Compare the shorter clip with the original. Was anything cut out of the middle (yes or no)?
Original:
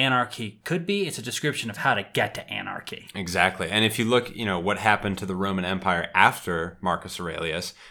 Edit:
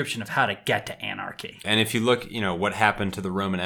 yes